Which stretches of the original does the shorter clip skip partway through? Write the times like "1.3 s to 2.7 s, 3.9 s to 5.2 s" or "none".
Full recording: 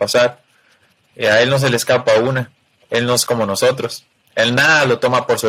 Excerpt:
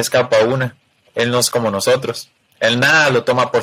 none